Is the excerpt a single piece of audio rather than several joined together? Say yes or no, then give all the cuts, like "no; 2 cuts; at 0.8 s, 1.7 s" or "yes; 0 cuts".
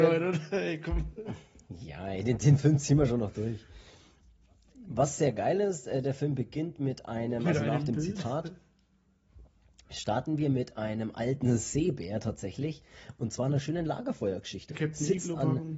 no; 1 cut; at 14.7 s